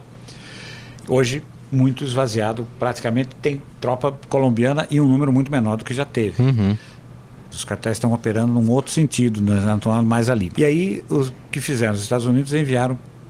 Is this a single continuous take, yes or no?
no